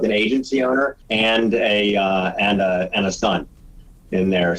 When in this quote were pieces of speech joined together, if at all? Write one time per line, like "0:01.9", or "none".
0:01.0